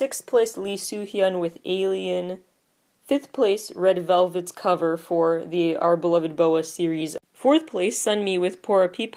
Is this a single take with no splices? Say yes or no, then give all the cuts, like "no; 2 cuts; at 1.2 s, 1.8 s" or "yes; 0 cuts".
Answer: yes; 0 cuts